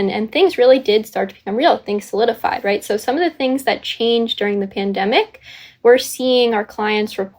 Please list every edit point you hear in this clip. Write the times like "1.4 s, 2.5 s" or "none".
none